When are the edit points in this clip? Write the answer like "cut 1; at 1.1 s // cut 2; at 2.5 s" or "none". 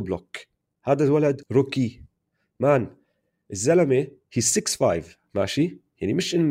cut 1; at 1.4 s